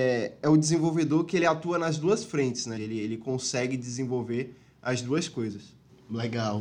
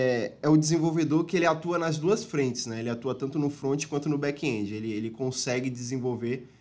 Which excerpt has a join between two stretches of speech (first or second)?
first